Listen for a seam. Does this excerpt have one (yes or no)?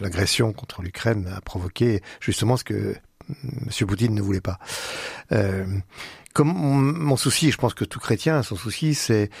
no